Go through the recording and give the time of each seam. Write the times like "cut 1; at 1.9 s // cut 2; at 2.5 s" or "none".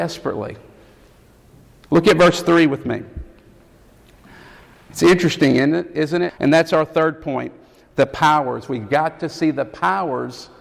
cut 1; at 6.3 s